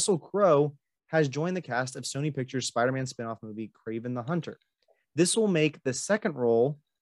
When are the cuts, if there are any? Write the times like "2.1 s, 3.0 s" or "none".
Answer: none